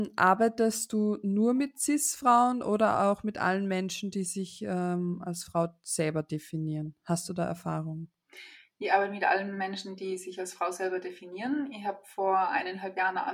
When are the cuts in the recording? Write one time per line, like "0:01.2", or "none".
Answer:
none